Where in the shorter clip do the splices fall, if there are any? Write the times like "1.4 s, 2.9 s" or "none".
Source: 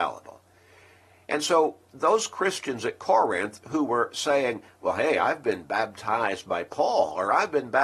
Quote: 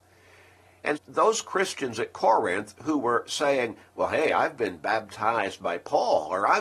1.0 s